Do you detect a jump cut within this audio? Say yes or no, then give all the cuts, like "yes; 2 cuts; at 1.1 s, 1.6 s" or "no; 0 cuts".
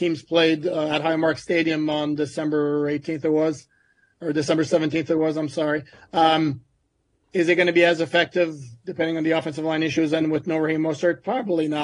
no; 0 cuts